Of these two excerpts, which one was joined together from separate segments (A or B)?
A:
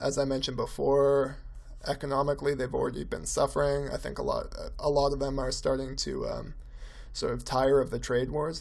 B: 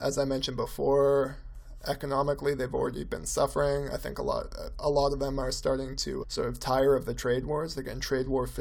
B